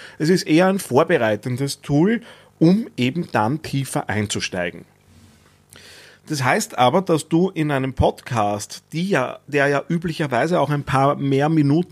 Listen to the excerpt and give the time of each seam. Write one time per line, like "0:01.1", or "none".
none